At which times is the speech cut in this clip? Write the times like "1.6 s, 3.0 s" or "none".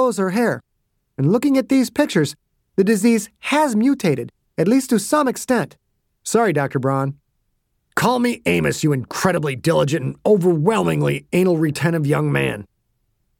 6.1 s

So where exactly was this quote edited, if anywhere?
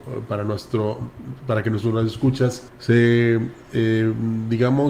2.7 s

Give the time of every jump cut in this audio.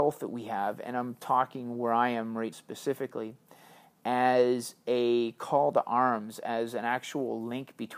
2.5 s

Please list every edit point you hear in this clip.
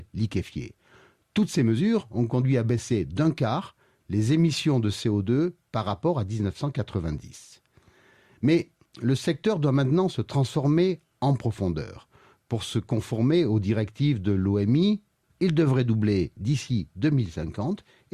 15.2 s

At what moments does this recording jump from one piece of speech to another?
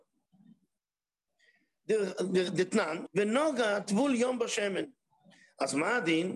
3.1 s

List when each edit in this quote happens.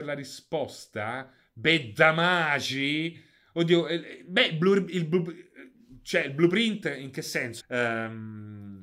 7.6 s

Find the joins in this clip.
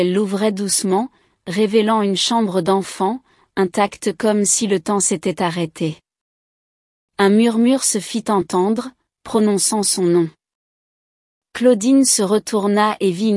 none

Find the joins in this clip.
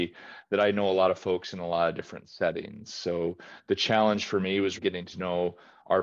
4.8 s

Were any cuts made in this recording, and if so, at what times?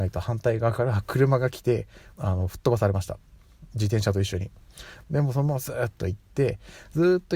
2.1 s, 3.7 s, 5.0 s

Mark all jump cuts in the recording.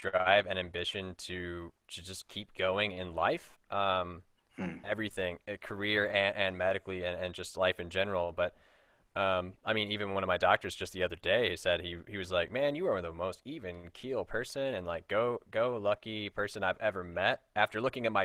none

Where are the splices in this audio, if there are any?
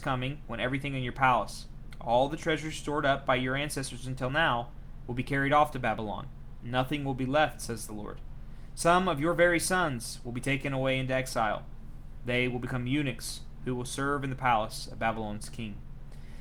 none

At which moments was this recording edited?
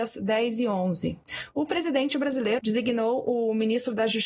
2.6 s

